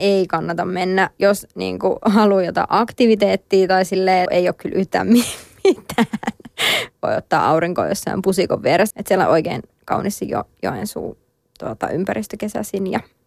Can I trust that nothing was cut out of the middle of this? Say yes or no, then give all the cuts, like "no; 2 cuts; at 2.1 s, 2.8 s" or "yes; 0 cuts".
no; 3 cuts; at 4.3 s, 6.9 s, 8.9 s